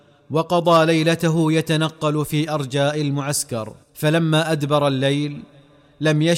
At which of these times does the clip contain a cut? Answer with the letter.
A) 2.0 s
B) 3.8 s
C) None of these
B